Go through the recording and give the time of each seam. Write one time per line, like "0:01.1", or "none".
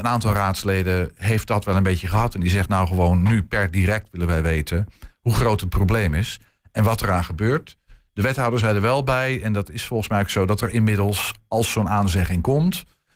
none

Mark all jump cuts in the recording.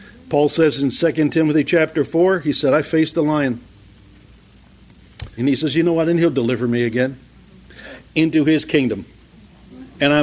0:05.4
0:08.0

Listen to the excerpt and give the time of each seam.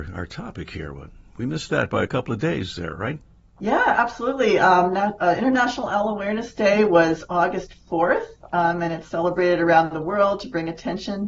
none

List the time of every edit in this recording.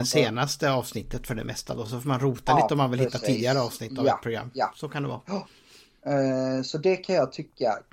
none

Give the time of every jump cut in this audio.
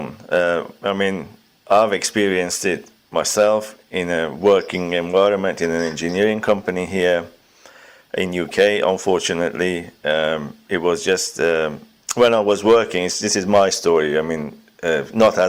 none

